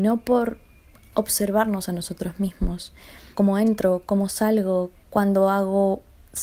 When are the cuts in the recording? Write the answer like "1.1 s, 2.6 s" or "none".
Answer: 5.0 s